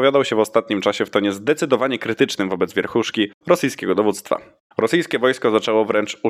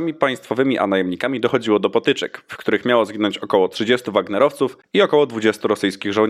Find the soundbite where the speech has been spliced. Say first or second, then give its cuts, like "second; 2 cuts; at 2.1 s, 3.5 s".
first; 1 cut; at 4.7 s